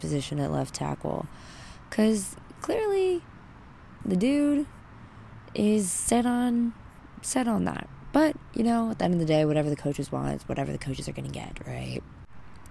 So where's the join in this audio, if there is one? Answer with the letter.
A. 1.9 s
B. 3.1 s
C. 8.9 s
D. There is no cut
D